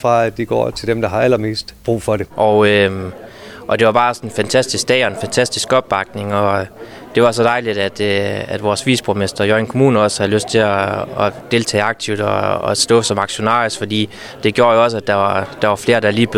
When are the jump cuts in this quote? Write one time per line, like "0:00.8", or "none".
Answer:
0:02.3